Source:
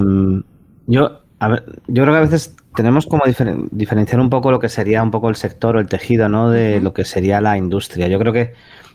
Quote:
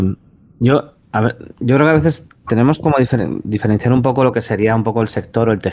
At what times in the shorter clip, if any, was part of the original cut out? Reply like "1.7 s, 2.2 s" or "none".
none